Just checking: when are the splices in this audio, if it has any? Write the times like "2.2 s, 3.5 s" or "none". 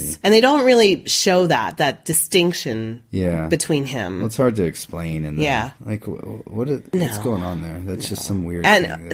5.8 s